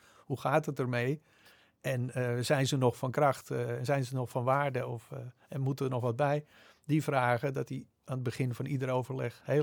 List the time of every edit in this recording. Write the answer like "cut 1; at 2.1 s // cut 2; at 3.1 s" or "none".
none